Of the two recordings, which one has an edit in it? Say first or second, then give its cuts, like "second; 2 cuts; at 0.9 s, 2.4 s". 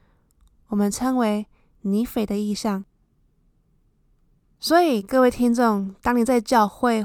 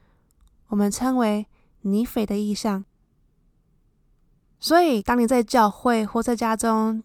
second; 1 cut; at 5.0 s